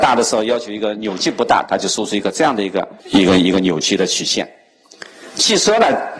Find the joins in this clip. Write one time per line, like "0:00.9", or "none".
0:01.7
0:03.0